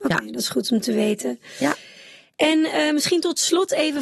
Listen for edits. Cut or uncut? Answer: uncut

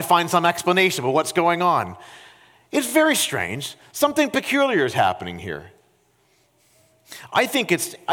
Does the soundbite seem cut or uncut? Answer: uncut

